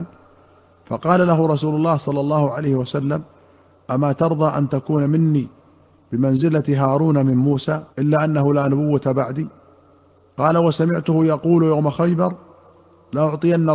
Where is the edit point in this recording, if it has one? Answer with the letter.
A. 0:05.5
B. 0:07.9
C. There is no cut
B